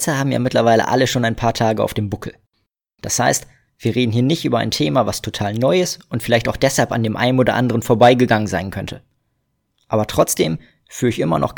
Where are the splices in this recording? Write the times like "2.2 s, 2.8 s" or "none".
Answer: none